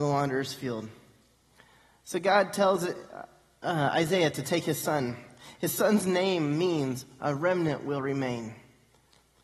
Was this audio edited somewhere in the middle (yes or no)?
no